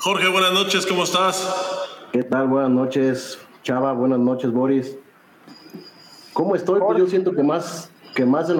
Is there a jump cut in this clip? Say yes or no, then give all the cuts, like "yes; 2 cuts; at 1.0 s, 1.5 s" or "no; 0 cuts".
no; 0 cuts